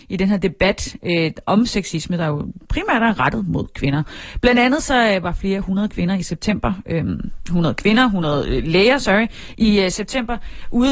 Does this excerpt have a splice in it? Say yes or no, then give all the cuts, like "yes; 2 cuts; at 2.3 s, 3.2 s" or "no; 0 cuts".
no; 0 cuts